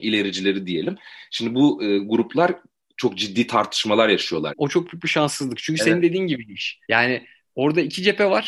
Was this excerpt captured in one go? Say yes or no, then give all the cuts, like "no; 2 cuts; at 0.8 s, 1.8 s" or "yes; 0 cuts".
no; 2 cuts; at 4.5 s, 6.8 s